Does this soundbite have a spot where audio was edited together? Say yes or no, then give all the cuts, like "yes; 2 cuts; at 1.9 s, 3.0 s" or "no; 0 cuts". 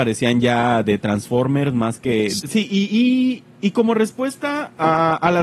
yes; 1 cut; at 2.4 s